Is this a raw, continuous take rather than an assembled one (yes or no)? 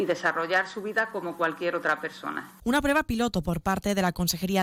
no